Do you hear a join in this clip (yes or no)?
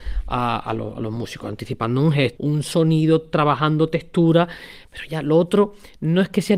yes